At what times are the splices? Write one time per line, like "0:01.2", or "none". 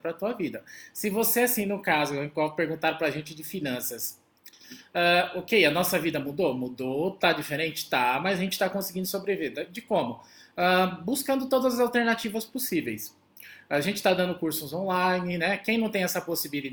none